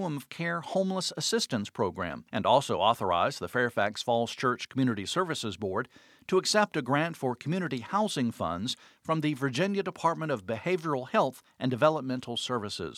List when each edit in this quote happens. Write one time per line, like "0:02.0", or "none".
0:02.3

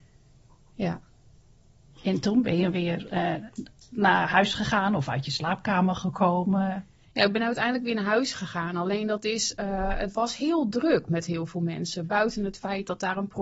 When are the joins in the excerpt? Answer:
none

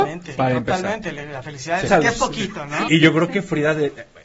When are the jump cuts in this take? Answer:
0:01.9
0:02.9

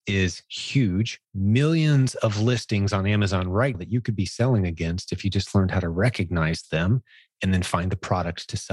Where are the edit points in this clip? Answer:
0:01.2
0:03.7

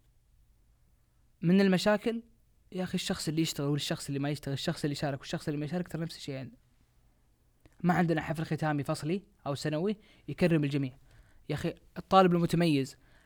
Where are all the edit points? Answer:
none

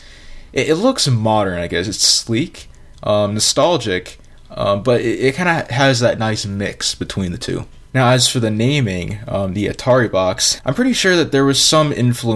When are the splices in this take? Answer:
none

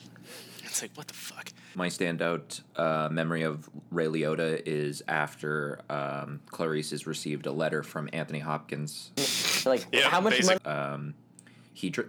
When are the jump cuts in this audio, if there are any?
0:09.2
0:10.6

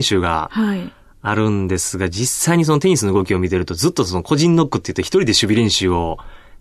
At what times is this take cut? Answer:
none

